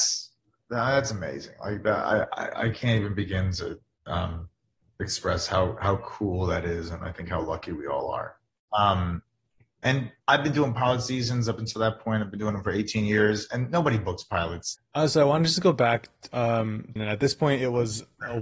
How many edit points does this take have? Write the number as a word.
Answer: three